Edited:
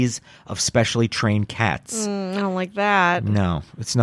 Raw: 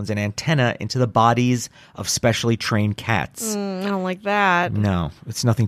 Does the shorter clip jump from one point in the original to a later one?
no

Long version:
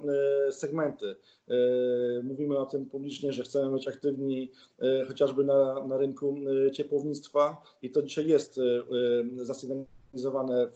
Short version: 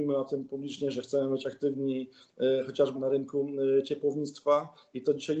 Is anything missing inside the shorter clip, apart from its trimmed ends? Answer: yes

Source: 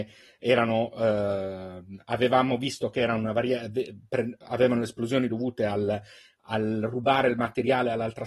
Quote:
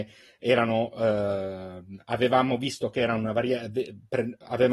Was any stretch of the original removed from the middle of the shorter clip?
no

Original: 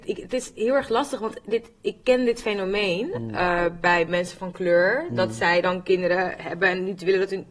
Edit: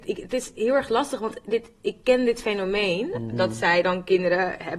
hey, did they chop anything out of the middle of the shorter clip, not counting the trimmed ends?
yes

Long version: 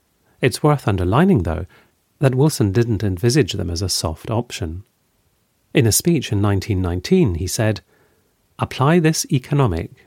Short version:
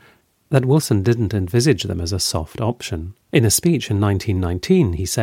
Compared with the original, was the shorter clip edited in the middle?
yes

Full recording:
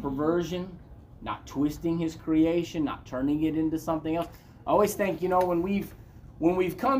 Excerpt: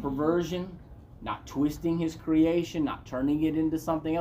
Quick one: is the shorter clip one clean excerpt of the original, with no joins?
yes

